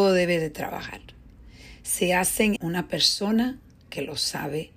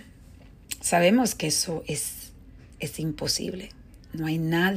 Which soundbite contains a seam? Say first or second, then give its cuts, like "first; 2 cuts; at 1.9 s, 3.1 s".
first; 1 cut; at 2.6 s